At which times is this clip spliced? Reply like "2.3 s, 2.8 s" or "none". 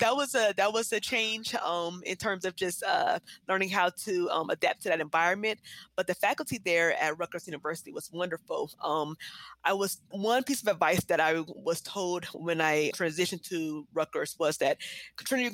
10.1 s, 12.9 s